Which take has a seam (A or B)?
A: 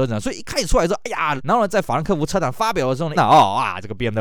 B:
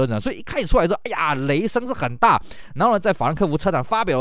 A